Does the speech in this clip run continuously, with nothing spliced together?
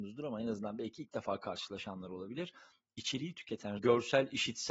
no; 1 cut; at 3.8 s

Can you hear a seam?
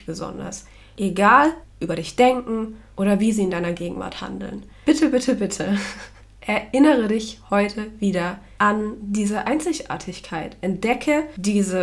yes; 1 cut; at 1.6 s

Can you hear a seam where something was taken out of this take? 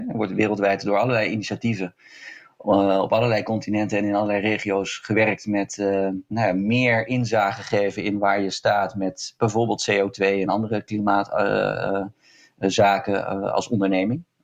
no; 0 cuts

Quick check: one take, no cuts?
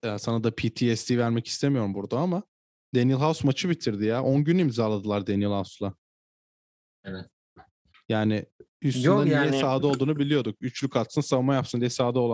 yes; 0 cuts

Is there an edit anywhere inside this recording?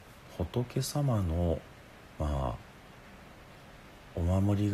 no; 0 cuts

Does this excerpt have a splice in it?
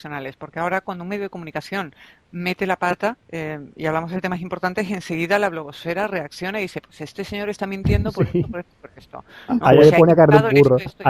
yes; 1 cut; at 3.2 s

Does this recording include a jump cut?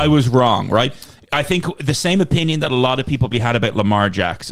yes; 1 cut; at 3.3 s

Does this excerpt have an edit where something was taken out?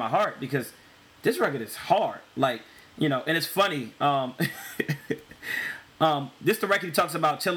no; 0 cuts

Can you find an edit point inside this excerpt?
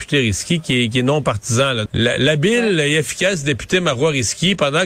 yes; 1 cut; at 1.9 s

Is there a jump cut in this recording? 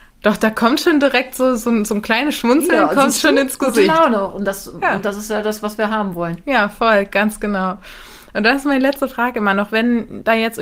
no; 0 cuts

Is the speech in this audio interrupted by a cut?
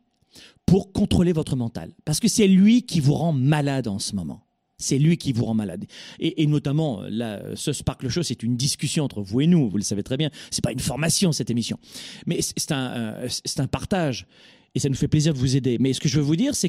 no; 0 cuts

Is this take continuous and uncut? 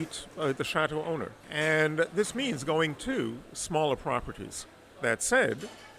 no; 1 cut; at 5.0 s

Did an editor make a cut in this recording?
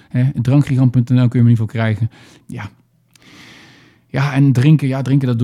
yes; 1 cut; at 2.4 s

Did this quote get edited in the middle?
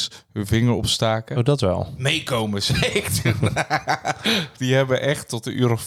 no; 0 cuts

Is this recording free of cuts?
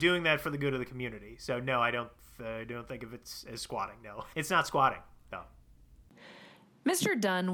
no; 1 cut; at 4.3 s

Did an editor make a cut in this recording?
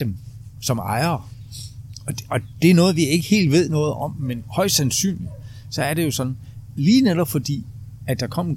no; 0 cuts

